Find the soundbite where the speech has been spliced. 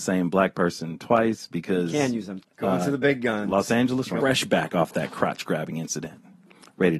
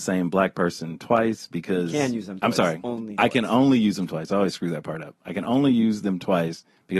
first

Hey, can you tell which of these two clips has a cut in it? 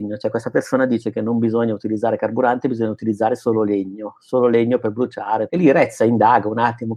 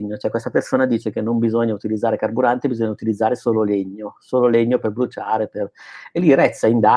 first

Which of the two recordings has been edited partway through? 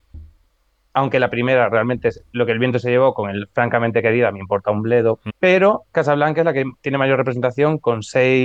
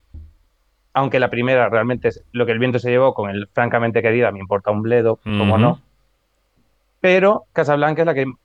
first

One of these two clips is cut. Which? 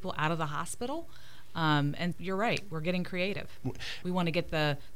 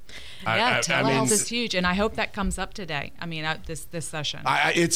first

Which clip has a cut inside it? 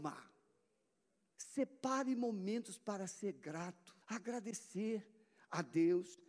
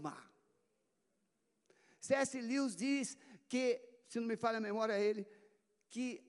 first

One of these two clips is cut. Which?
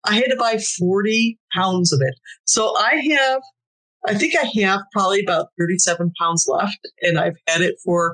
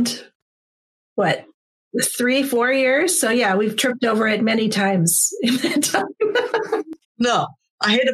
second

